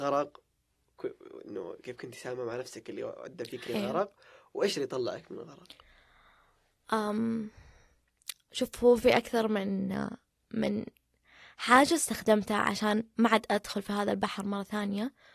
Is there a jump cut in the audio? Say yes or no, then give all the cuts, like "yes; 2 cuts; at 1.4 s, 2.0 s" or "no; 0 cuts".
no; 0 cuts